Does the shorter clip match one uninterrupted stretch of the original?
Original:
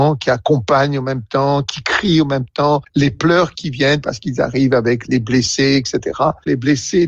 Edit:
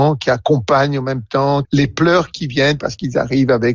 no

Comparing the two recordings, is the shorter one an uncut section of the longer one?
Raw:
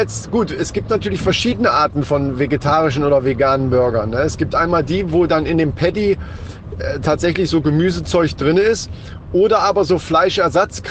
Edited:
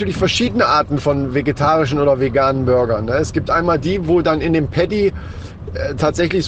yes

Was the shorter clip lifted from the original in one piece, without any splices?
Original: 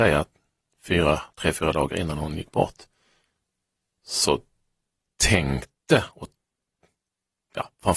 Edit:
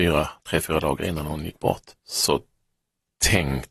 no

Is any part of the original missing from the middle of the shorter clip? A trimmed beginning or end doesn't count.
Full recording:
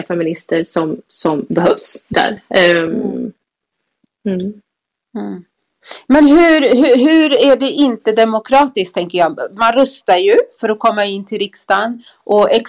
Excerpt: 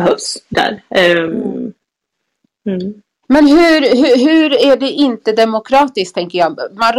yes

